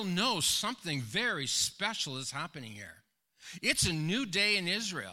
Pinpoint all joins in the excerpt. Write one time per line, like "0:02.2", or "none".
none